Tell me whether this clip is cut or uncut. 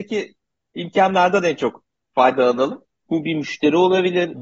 cut